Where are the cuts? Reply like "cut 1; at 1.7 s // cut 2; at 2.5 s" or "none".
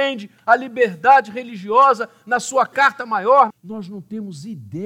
cut 1; at 3.5 s